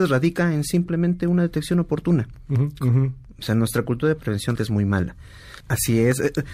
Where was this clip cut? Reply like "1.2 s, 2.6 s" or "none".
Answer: 2.8 s, 4.6 s, 5.6 s